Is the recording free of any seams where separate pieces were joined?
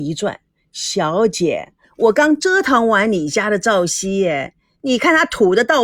yes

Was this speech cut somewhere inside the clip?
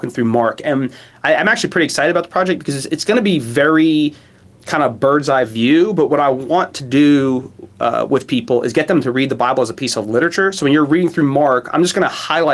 no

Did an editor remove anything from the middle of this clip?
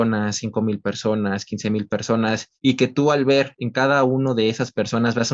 no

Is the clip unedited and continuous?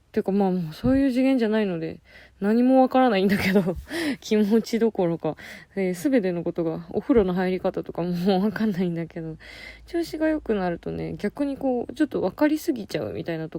yes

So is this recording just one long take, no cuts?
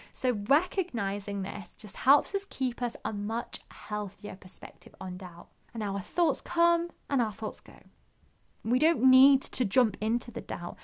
no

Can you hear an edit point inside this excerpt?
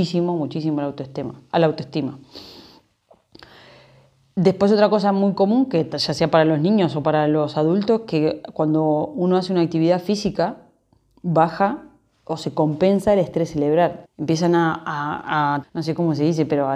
yes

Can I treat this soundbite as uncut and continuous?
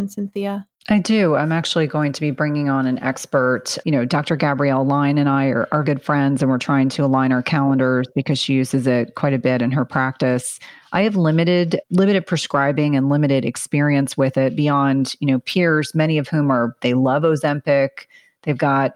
no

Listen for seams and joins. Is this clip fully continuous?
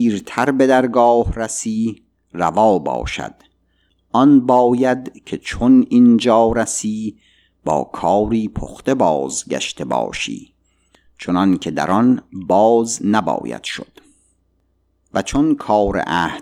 yes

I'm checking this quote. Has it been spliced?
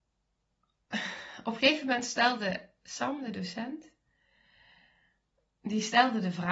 no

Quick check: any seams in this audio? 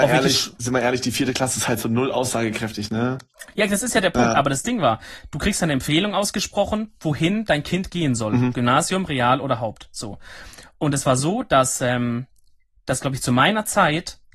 no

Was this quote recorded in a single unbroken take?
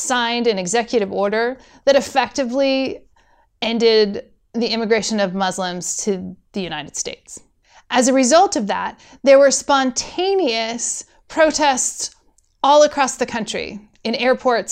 yes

